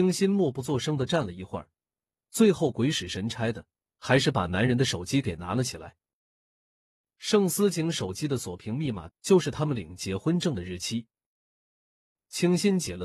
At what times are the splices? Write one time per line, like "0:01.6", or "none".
0:09.1